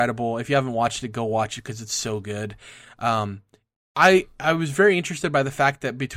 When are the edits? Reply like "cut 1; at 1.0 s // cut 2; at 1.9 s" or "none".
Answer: none